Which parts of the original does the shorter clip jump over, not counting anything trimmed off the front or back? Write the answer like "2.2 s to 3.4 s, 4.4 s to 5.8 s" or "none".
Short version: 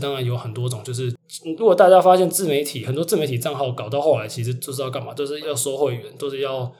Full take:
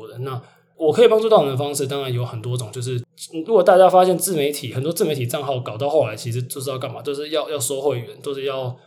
7.3 s to 7.5 s